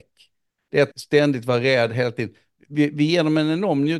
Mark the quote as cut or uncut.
cut